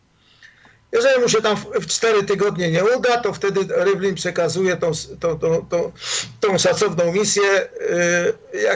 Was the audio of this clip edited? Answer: no; 0 cuts

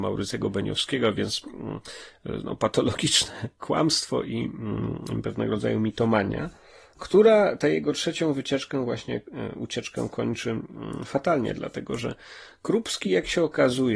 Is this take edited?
no; 0 cuts

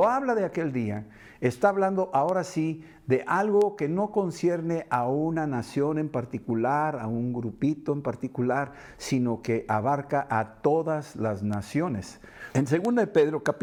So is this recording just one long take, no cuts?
no; 1 cut; at 12.5 s

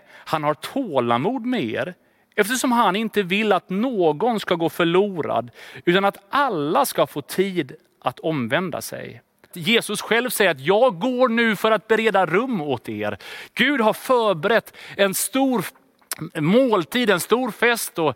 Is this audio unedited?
no; 1 cut; at 9.5 s

